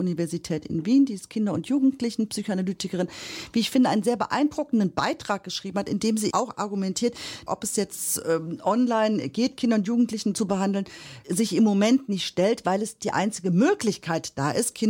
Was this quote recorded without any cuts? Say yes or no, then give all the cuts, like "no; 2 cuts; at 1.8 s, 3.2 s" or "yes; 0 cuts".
no; 2 cuts; at 6.3 s, 7.5 s